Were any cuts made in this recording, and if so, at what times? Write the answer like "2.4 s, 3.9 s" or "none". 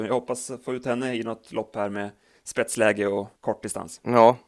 3.4 s